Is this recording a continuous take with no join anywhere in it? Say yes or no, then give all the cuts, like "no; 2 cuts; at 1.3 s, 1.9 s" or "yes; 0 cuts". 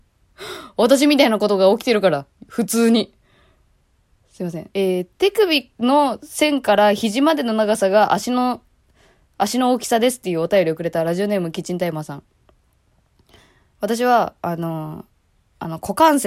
no; 1 cut; at 4.7 s